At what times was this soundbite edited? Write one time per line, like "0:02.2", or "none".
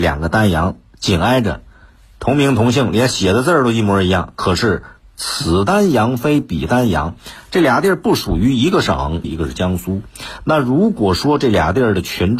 0:09.2